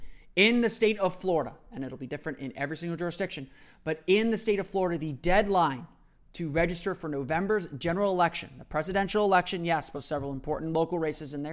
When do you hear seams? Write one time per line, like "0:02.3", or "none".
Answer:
0:09.9